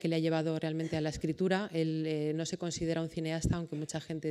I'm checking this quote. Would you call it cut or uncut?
uncut